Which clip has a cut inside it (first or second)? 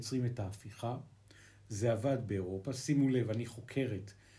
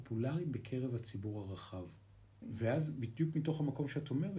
second